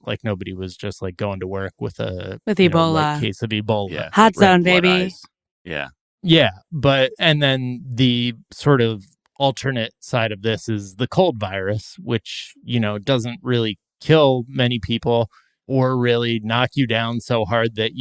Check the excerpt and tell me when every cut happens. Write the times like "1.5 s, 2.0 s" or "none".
none